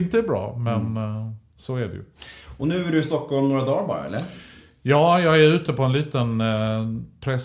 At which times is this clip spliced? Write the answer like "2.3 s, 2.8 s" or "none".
none